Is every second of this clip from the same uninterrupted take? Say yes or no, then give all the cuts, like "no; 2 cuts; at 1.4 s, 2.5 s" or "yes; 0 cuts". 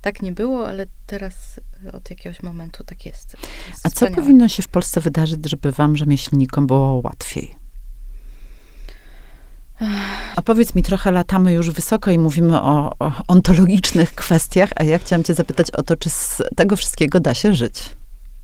no; 1 cut; at 10.3 s